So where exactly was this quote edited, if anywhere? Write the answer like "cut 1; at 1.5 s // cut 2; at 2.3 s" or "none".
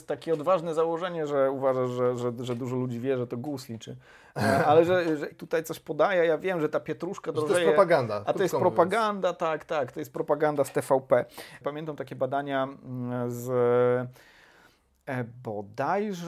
cut 1; at 5.3 s // cut 2; at 11.6 s